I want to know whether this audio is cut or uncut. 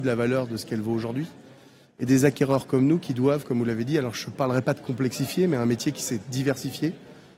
uncut